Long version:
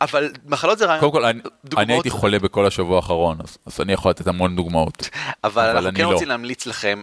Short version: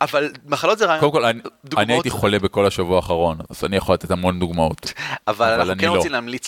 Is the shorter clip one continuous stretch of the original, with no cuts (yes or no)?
no